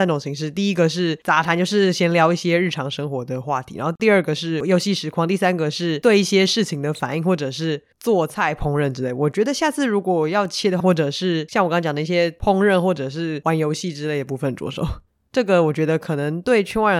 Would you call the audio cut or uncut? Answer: cut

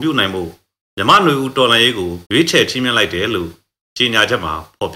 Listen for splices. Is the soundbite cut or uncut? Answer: cut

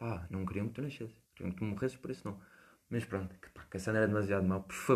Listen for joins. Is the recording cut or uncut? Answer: cut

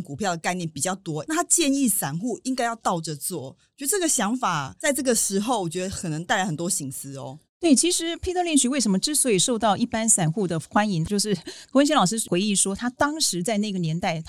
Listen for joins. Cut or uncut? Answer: uncut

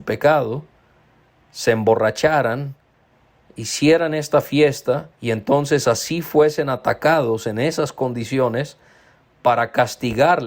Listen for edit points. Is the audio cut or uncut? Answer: cut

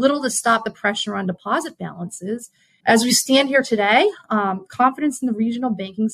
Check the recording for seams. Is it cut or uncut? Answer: cut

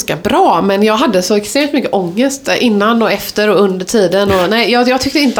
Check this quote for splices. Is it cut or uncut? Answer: uncut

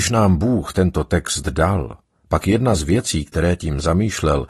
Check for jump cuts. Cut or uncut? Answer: uncut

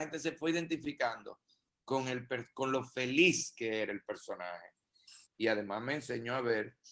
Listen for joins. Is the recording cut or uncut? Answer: cut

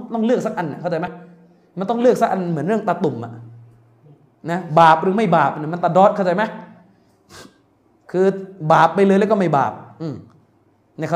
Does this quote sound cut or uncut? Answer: uncut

